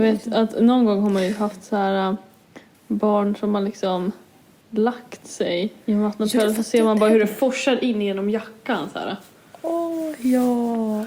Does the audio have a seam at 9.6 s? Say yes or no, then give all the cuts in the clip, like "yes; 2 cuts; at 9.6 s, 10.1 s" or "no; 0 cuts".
no; 0 cuts